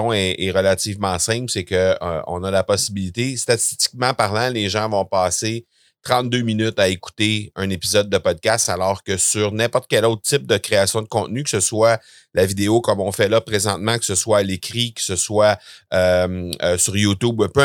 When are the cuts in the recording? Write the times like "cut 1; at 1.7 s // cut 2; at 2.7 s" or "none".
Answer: none